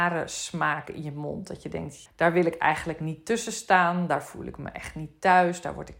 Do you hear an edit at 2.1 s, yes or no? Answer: yes